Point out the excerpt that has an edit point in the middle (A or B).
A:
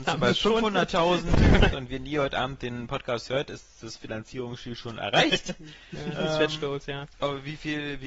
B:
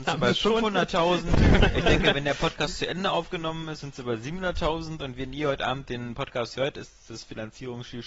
A